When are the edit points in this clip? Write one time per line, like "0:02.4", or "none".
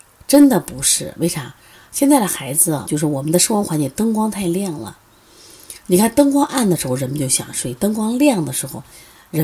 0:02.9